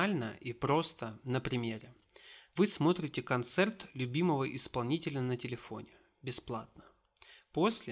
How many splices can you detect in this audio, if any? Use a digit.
1